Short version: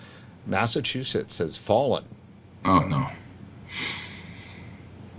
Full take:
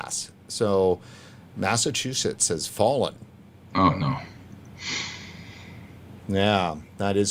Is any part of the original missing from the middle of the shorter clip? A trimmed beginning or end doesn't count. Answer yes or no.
no